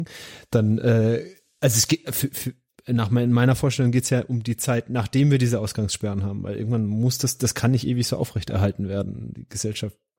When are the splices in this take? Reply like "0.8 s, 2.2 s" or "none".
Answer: none